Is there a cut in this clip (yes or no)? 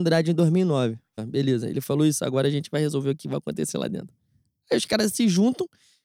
yes